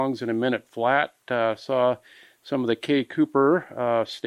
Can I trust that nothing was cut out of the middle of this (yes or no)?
yes